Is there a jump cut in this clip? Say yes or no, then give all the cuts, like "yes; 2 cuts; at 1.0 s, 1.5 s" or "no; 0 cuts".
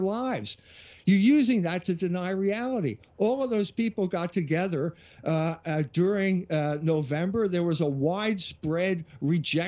no; 0 cuts